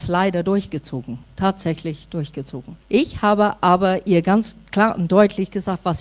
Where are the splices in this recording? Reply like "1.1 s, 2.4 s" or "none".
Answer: 2.8 s